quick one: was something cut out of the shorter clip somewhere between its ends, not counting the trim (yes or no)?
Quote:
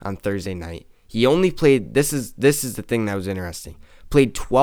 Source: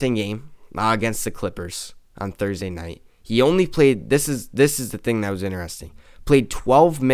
no